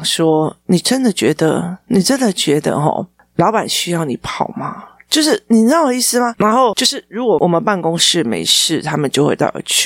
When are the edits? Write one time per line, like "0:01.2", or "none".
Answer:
0:06.4